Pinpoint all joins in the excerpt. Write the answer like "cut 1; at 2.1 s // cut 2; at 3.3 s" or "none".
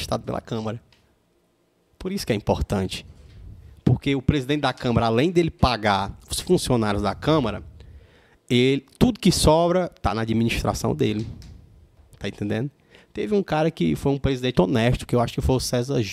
cut 1; at 14.5 s